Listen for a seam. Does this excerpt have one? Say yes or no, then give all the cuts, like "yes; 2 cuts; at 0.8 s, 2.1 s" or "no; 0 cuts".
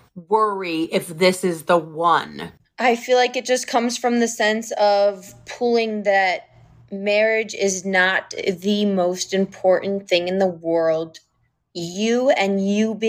no; 0 cuts